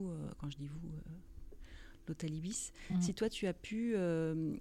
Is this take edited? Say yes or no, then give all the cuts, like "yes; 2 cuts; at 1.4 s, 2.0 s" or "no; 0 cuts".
no; 0 cuts